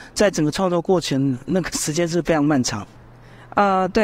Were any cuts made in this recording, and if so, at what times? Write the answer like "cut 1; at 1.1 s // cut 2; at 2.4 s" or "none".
none